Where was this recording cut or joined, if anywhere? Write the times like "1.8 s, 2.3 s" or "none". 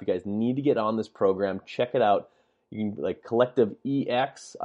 none